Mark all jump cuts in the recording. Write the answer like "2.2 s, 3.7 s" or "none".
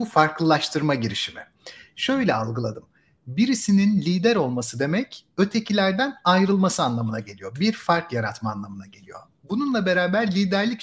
none

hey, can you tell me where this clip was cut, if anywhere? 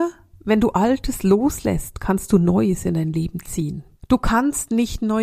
4.0 s

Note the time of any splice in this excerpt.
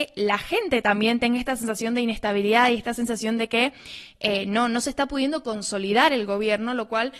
none

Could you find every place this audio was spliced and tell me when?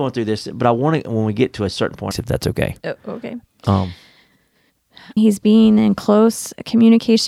2.1 s, 5.2 s

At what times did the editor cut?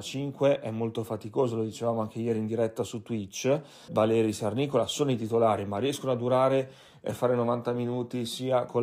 3.9 s

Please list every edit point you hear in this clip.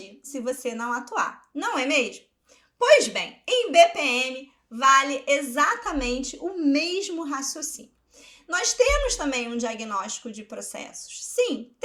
none

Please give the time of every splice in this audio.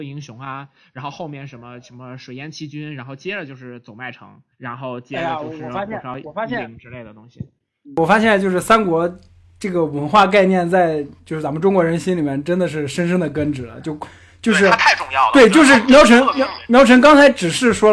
4.5 s

